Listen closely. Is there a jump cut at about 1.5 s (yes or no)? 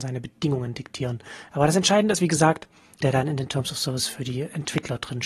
yes